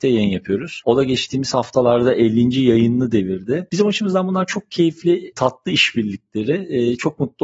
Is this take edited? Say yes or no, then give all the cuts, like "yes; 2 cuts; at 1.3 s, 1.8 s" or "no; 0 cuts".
no; 0 cuts